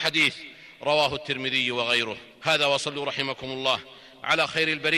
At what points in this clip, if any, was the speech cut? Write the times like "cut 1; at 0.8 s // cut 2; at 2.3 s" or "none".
cut 1; at 2.3 s